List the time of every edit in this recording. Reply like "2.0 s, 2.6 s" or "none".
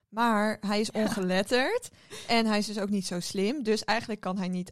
none